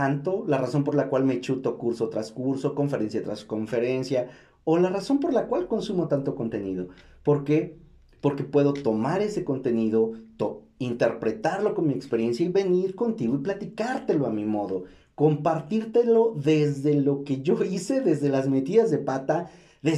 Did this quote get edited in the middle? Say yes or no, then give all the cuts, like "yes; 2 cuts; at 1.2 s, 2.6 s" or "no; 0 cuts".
no; 0 cuts